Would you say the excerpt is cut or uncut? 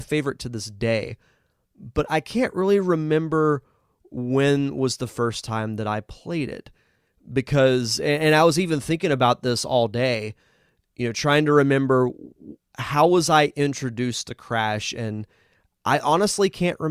uncut